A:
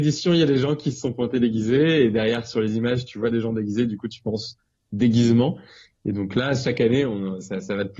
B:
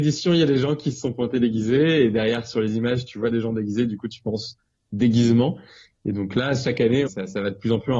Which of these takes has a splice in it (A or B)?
B